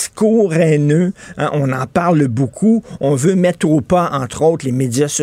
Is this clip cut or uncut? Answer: uncut